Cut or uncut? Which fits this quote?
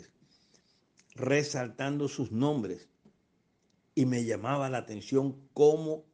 uncut